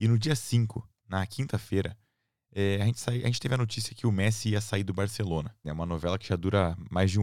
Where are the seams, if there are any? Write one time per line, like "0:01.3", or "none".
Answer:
0:05.6